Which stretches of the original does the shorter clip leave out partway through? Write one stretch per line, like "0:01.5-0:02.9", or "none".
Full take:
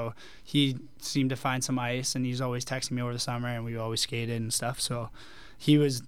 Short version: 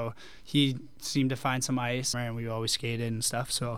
0:02.1-0:03.4